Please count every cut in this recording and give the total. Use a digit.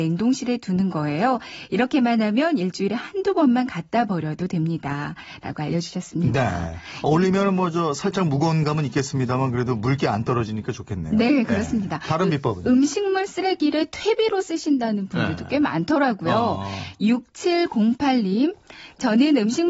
0